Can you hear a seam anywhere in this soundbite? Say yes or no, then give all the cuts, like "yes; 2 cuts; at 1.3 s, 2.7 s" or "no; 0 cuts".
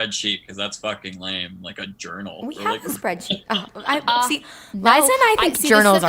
no; 0 cuts